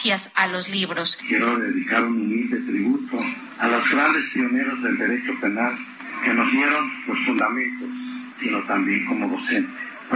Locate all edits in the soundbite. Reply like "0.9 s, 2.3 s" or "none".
1.2 s, 8.3 s